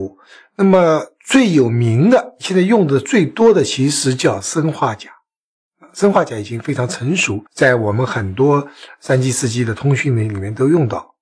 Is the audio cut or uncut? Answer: cut